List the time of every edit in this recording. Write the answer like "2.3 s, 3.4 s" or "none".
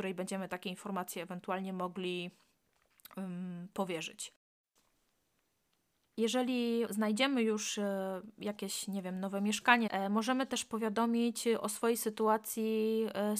6.9 s, 9.9 s